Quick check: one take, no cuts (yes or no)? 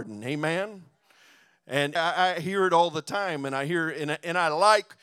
no